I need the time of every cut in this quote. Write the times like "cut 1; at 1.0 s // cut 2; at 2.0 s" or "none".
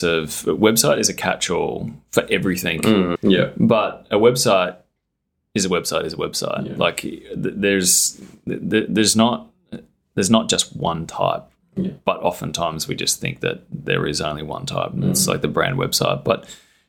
cut 1; at 3.2 s